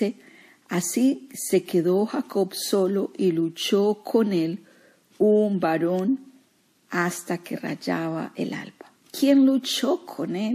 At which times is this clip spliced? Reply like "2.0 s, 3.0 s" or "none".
9.0 s